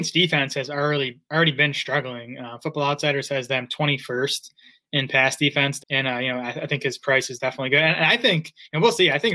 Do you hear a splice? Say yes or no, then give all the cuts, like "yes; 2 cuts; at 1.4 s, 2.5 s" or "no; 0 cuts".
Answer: yes; 1 cut; at 5.8 s